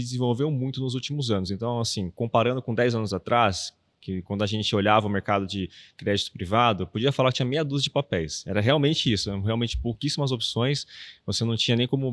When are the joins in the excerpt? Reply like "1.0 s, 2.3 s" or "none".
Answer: none

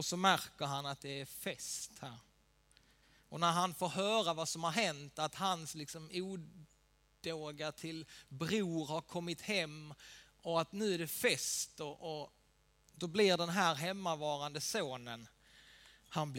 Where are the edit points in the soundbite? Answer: none

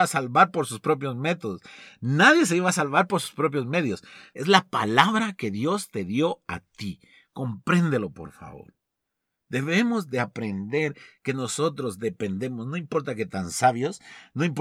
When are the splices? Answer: 4.3 s

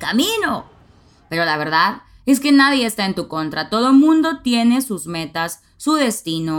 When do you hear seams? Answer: none

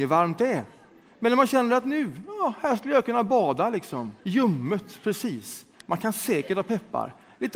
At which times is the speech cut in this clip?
4.2 s, 5.8 s

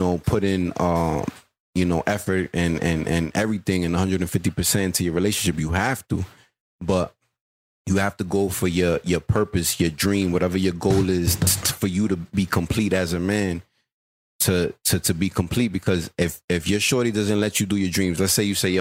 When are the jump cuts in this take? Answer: none

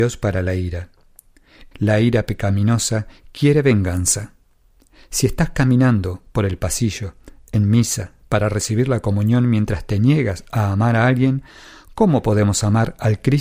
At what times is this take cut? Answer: 1.7 s

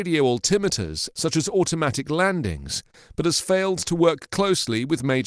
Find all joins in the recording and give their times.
1.1 s

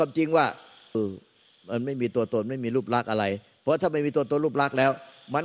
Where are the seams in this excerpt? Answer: 0.9 s

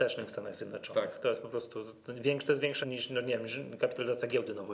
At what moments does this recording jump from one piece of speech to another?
2.8 s

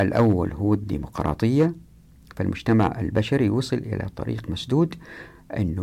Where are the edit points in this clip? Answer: none

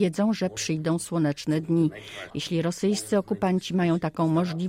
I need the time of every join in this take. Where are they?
2.3 s

